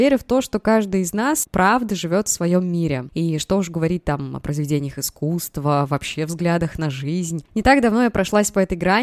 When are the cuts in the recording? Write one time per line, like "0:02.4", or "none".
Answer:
0:03.1
0:07.5